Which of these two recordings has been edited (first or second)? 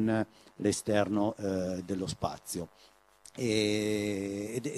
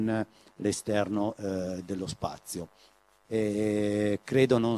second